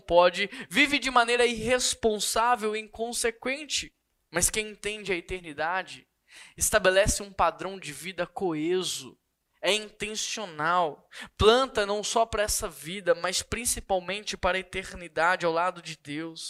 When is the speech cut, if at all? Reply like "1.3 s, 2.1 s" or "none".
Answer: none